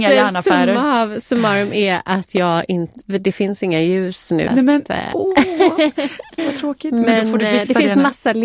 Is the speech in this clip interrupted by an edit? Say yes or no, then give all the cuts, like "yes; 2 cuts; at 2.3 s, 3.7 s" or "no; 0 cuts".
yes; 2 cuts; at 4.5 s, 6.4 s